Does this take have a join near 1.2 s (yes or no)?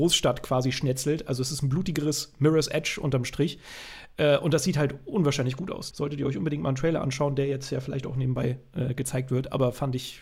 no